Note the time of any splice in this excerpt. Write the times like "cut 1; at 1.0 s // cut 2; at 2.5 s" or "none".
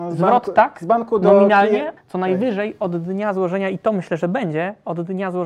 cut 1; at 2.0 s